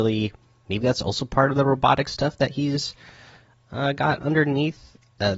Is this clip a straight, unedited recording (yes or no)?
yes